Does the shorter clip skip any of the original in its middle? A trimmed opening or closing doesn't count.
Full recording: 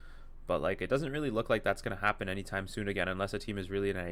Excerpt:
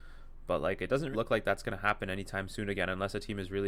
yes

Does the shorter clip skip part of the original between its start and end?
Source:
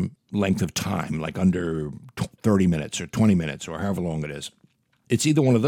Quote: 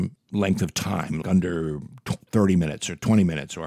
yes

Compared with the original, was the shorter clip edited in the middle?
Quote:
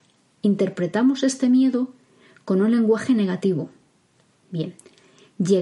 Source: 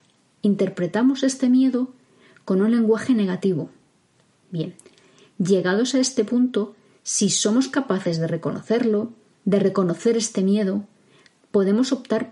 no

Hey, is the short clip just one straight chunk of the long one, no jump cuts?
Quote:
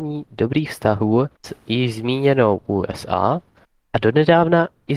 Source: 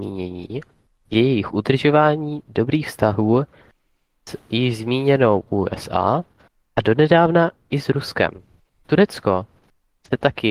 no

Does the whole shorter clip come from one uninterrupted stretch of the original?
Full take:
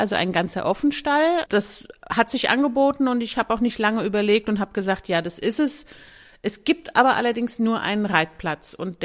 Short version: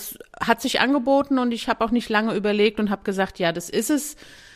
yes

